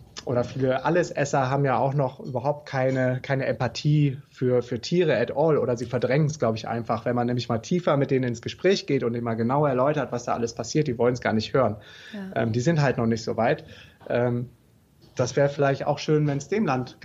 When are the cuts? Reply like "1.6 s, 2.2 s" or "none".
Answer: 13.9 s